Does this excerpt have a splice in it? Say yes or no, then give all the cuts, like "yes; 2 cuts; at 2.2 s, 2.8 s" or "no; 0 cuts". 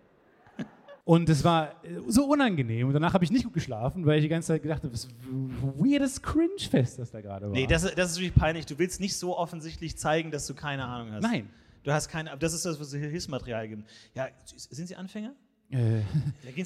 yes; 1 cut; at 1.0 s